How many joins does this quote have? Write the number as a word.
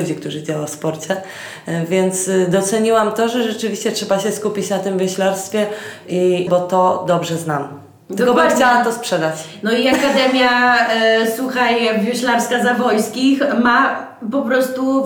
one